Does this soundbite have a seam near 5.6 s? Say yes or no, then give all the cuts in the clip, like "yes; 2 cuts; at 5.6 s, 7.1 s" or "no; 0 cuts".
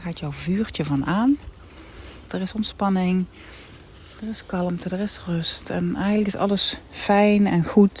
no; 1 cut; at 2.3 s